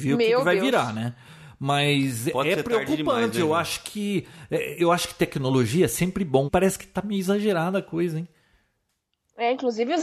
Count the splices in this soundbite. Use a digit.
1